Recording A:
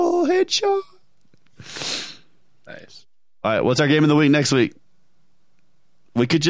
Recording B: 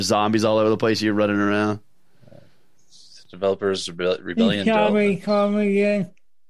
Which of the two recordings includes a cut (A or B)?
B